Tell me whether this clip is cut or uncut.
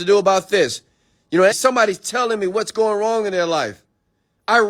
cut